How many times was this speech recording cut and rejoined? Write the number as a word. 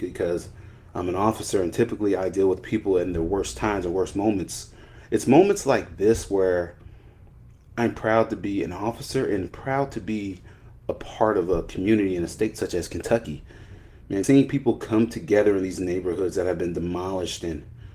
one